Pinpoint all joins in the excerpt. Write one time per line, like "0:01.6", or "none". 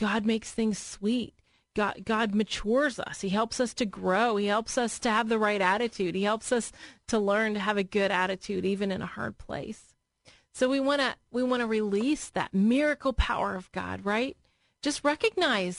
none